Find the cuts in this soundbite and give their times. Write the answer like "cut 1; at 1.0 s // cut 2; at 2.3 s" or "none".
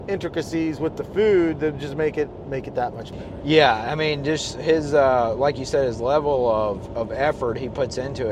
none